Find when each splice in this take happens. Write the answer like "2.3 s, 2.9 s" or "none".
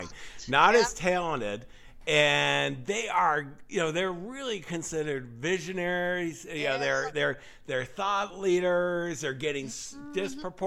none

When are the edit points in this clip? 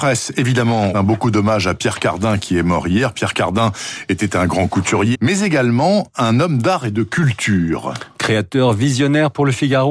0.9 s, 5.1 s

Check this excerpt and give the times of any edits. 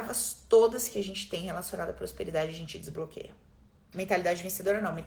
3.9 s

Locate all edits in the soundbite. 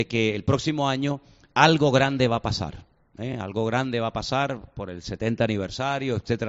none

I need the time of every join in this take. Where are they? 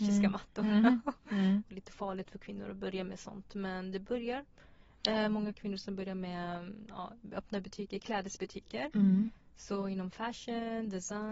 1.6 s

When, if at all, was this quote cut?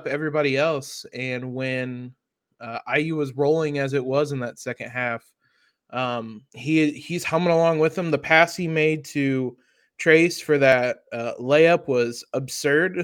6.5 s

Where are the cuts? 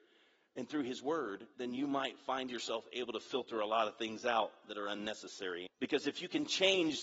1.5 s, 5.7 s

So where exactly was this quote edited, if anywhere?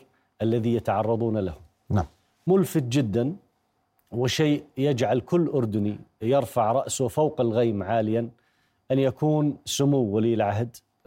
none

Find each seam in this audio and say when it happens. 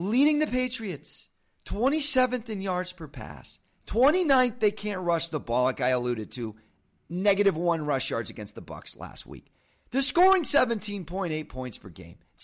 none

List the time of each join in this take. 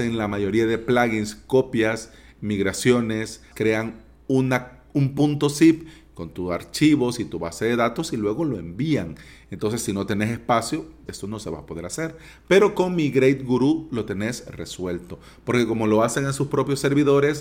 3.5 s, 11.1 s

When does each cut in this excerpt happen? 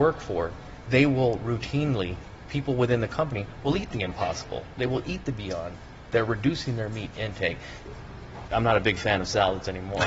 6.1 s, 8.5 s

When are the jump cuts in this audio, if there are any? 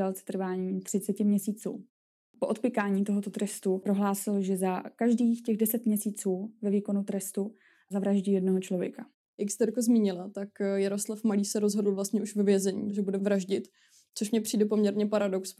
none

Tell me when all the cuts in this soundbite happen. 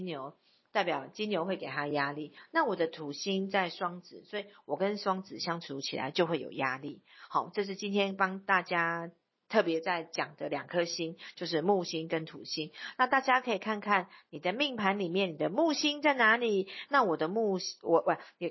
16.9 s

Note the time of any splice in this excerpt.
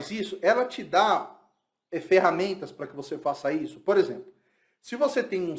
none

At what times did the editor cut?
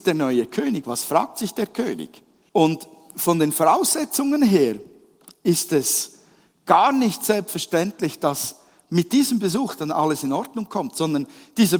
2.5 s

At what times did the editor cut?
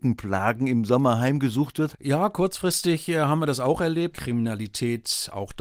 1.9 s, 4.1 s

